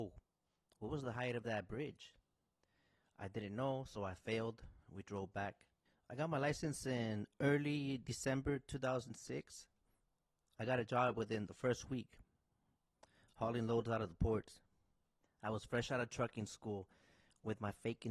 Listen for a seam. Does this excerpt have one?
yes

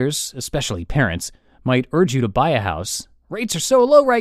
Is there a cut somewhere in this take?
no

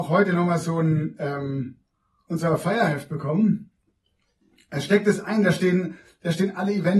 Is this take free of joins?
yes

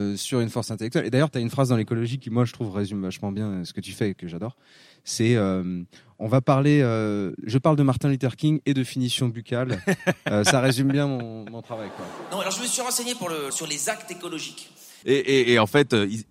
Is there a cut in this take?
yes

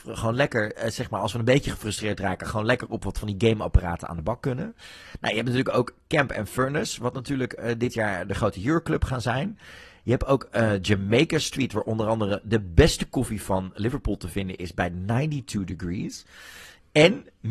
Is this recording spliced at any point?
no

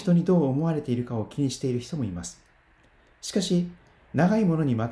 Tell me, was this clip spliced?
no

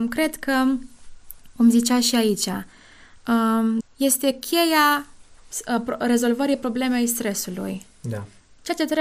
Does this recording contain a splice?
yes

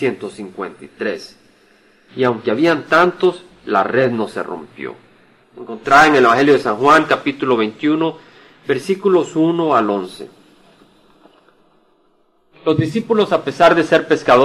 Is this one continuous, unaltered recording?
no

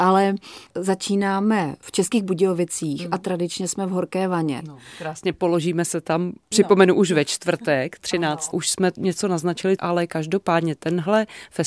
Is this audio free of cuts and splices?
no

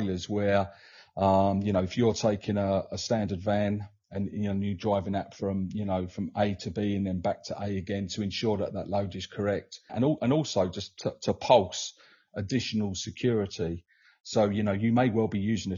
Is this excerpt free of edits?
no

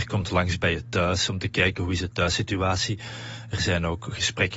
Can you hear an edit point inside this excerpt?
no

